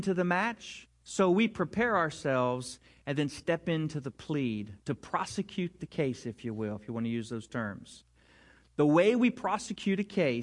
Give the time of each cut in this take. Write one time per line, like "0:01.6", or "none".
none